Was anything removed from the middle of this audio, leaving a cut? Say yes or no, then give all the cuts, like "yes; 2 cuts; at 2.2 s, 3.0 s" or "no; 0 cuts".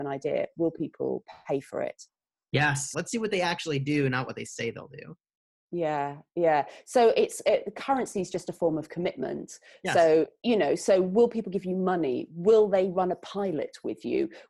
yes; 1 cut; at 2.9 s